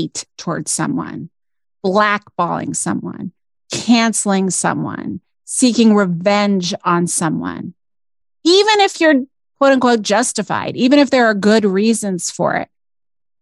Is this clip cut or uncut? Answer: uncut